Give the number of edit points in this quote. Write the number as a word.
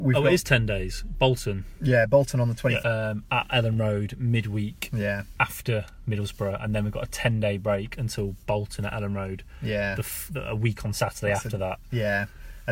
one